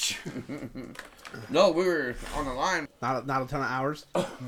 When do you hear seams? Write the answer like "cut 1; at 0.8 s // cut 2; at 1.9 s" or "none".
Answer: cut 1; at 2.9 s